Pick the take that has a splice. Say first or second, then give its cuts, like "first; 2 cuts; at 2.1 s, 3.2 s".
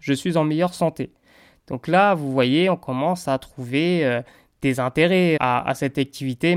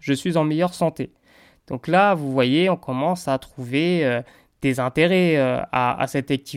first; 1 cut; at 5.4 s